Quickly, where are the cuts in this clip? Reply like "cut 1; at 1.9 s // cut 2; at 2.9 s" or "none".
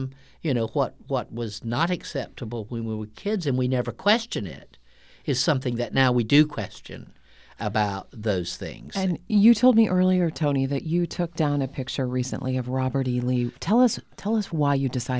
none